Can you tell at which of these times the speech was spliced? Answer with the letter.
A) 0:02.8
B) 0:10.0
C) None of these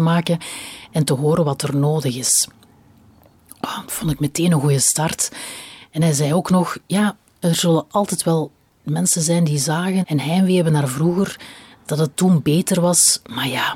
B